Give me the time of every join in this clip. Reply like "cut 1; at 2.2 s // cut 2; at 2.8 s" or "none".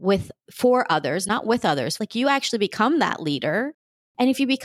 cut 1; at 2.0 s